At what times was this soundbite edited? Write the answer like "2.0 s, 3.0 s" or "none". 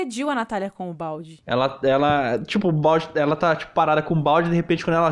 1.4 s